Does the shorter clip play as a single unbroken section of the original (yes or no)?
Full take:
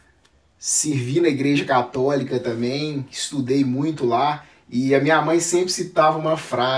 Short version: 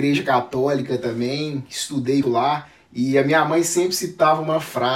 no